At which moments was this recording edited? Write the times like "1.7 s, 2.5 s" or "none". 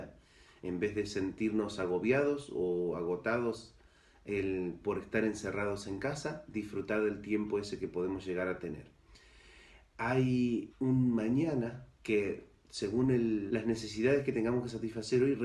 10.7 s, 11.9 s, 13.5 s